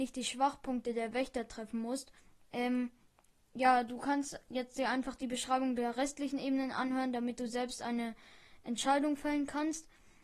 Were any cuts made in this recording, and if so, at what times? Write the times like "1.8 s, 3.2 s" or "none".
2.4 s